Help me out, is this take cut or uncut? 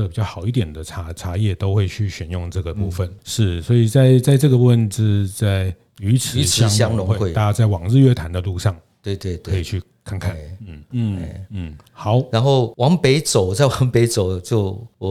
cut